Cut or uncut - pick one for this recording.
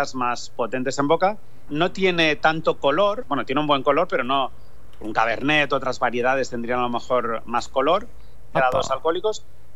cut